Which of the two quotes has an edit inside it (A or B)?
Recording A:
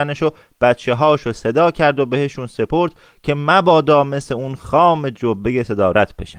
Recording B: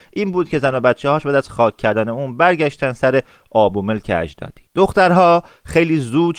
B